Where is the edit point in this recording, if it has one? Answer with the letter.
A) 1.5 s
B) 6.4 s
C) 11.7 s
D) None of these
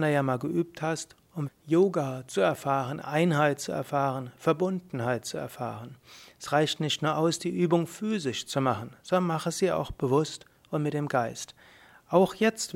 A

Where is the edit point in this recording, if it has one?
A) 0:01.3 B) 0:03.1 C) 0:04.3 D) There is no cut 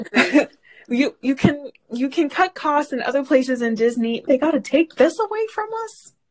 C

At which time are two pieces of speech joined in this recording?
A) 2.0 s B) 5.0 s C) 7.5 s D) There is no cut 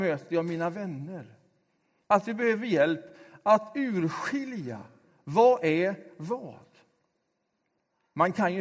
A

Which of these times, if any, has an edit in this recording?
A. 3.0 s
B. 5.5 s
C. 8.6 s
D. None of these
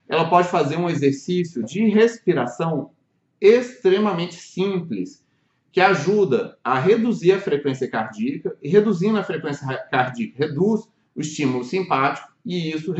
D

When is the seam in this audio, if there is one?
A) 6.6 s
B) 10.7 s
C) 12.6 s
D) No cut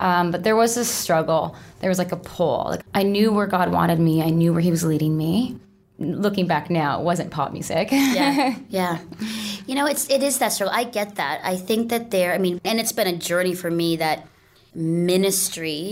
C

